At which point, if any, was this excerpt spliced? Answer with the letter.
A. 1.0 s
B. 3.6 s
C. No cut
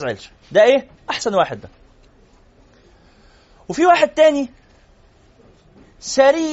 A